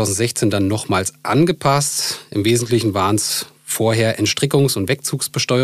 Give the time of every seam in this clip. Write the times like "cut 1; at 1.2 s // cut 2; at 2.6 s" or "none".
none